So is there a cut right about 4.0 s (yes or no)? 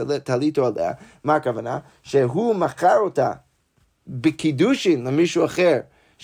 no